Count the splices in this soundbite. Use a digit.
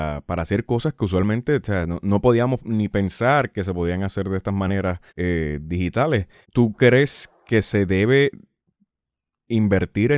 2